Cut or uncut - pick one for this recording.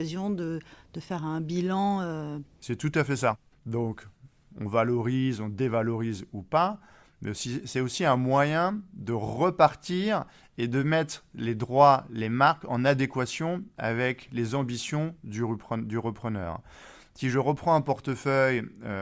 cut